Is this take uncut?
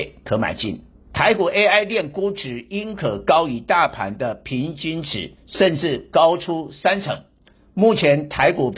no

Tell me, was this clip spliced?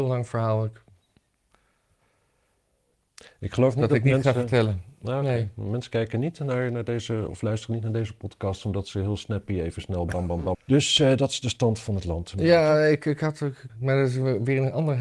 yes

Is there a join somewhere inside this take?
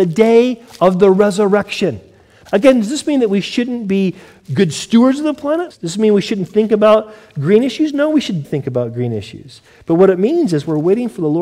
yes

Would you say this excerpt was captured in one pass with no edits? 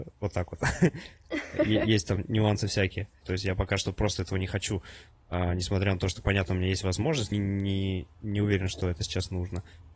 no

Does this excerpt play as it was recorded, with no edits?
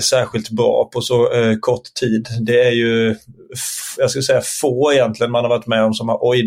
yes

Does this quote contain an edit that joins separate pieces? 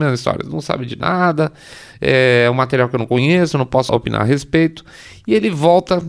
yes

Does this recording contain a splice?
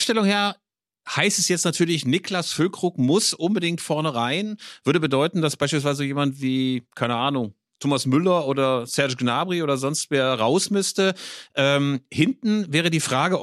no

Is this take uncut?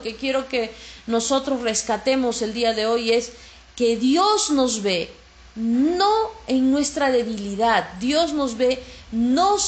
yes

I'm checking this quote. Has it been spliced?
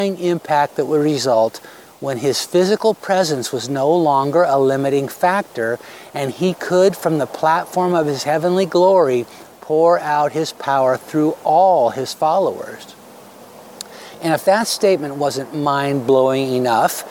no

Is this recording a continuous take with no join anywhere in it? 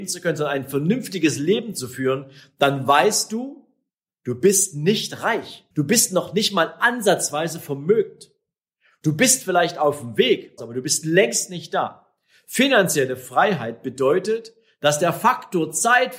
no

